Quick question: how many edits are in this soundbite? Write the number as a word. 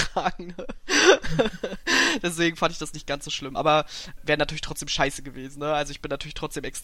zero